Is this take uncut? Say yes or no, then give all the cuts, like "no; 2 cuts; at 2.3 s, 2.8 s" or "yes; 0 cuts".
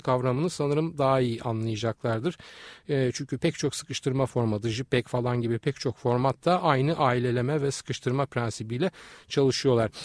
yes; 0 cuts